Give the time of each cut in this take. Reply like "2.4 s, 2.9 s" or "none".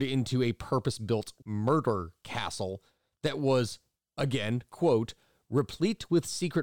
1.4 s